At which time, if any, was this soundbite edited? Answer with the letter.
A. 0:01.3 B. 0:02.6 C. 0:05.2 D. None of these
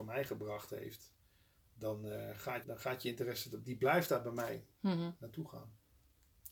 B